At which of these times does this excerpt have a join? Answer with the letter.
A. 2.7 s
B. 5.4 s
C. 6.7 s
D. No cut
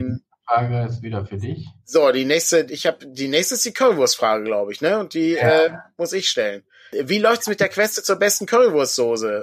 A